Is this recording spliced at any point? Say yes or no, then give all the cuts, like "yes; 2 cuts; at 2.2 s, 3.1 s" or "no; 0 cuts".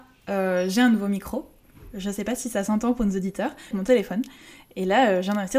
yes; 1 cut; at 3.7 s